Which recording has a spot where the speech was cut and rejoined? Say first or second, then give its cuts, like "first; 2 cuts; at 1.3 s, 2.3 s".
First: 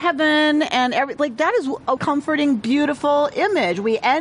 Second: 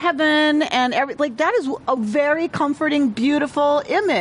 first; 1 cut; at 2.0 s